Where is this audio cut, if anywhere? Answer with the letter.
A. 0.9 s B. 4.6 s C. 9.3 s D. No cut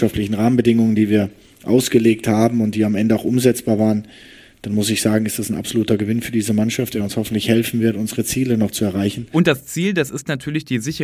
D